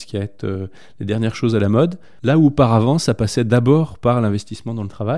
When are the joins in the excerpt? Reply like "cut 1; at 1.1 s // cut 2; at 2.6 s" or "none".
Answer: cut 1; at 2.2 s